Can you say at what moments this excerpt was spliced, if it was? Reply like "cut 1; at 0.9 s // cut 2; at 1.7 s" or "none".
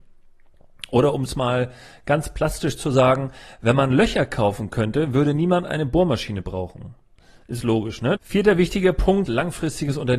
cut 1; at 8.2 s // cut 2; at 9.3 s